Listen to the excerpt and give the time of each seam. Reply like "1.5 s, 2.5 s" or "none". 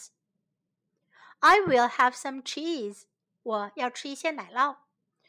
none